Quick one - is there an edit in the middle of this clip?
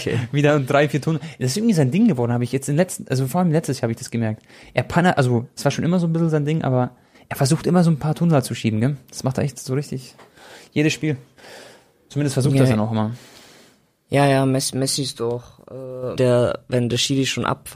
yes; 1 cut; at 16.2 s

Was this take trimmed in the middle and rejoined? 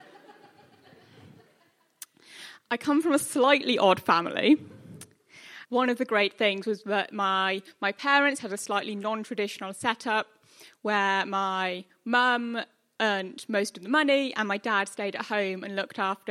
yes; 1 cut; at 5.7 s

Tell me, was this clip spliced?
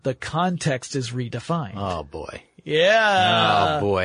no; 0 cuts

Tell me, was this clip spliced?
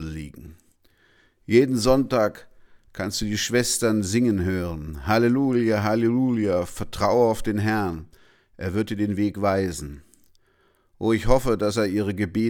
no; 0 cuts

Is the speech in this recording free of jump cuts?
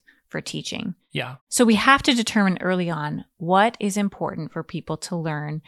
yes; 0 cuts

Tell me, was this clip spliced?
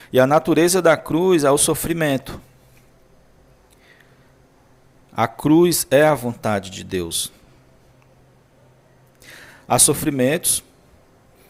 no; 0 cuts

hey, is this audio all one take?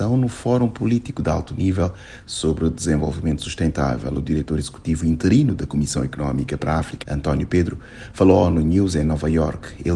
no; 1 cut; at 7.0 s

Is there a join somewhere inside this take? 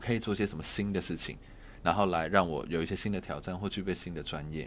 no; 0 cuts

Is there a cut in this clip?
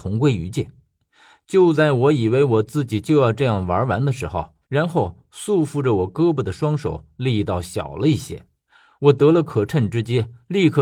yes; 1 cut; at 4.6 s

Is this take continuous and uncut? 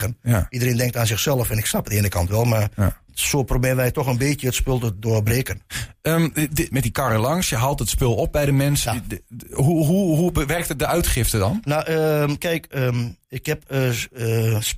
no; 2 cuts; at 6.7 s, 8.9 s

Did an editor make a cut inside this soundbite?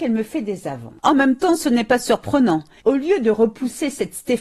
yes; 1 cut; at 2.8 s

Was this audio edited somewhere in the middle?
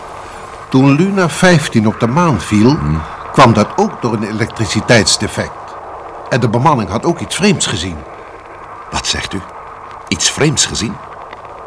no; 0 cuts

